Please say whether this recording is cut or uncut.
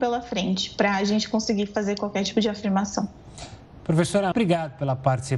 cut